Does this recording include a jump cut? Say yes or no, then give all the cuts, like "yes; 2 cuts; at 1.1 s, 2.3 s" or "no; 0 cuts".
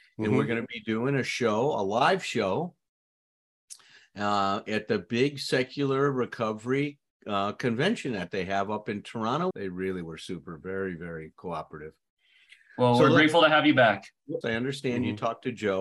yes; 2 cuts; at 9.5 s, 14.4 s